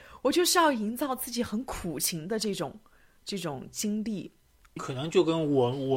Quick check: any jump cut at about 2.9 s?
no; 1 cut; at 4.8 s

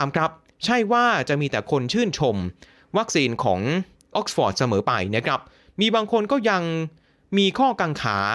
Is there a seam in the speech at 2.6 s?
no; 1 cut; at 4.1 s

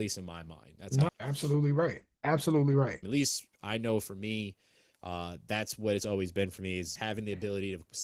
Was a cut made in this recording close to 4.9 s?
no; 3 cuts; at 1.1 s, 3.0 s, 7.0 s

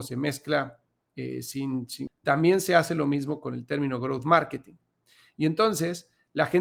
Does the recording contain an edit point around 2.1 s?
yes; 1 cut; at 2.1 s

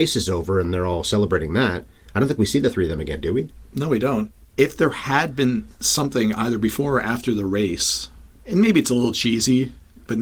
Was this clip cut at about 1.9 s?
no; 1 cut; at 4.5 s

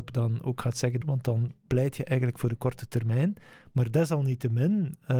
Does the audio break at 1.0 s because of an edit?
yes; 1 cut; at 1.0 s

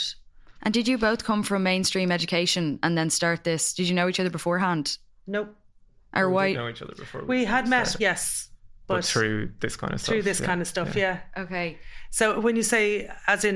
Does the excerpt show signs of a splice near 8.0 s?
yes; 1 cut; at 8.0 s

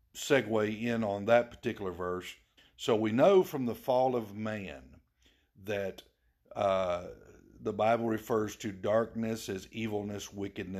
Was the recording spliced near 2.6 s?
yes; 1 cut; at 2.6 s

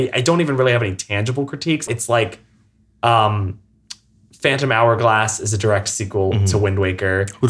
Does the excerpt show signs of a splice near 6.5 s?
no; 1 cut; at 1.9 s

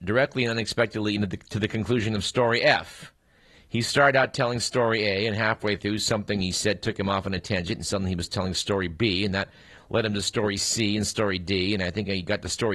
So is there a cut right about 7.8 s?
no; 1 cut; at 3.5 s

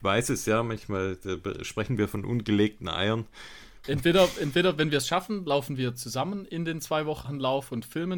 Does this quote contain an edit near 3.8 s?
yes; 2 cuts; at 3.8 s, 7.2 s

